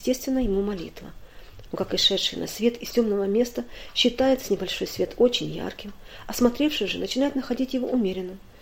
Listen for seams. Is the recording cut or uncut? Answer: cut